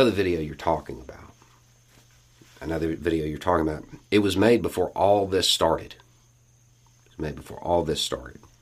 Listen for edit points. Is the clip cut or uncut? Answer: uncut